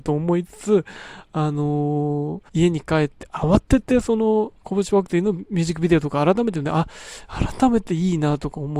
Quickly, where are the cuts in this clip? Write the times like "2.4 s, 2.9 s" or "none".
2.5 s